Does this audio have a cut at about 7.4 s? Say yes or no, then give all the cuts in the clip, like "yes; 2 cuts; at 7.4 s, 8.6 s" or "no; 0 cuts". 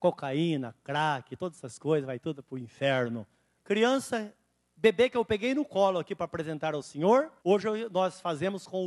yes; 2 cuts; at 3.6 s, 7.4 s